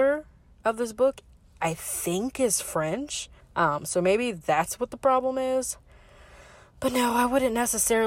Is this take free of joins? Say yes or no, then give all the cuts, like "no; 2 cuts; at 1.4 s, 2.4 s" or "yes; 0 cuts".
no; 1 cut; at 3.4 s